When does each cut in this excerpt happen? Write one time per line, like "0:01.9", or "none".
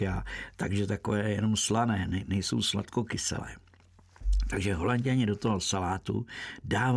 none